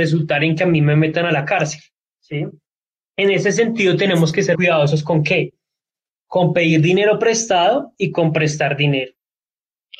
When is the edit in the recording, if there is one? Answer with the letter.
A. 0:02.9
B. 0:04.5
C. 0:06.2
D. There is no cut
B